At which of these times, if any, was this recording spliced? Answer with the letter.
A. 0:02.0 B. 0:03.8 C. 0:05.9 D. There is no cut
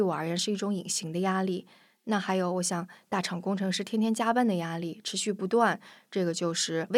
D